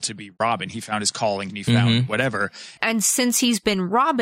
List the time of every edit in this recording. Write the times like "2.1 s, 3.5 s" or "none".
1.5 s, 2.8 s